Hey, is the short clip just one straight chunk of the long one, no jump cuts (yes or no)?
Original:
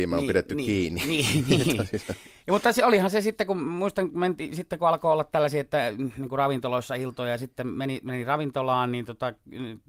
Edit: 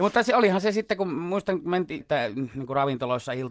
no